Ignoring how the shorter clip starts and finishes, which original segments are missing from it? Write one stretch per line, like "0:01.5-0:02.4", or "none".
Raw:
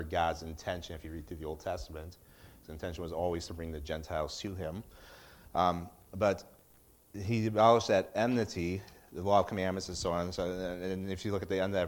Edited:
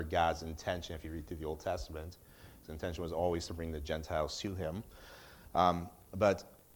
none